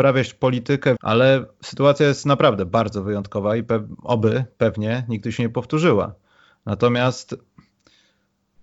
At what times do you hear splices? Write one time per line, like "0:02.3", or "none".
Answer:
0:01.0